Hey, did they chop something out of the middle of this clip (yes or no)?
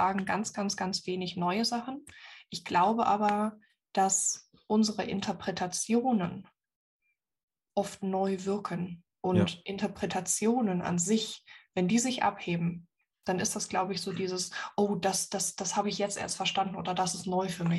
no